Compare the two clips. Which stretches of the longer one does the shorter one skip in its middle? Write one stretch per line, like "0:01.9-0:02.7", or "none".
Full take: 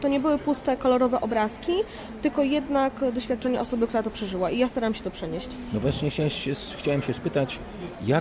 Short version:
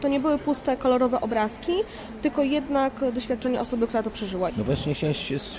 0:04.5-0:05.7